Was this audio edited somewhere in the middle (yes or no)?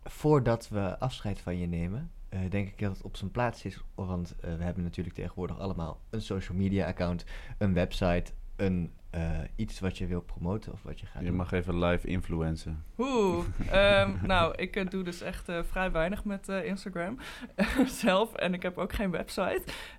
no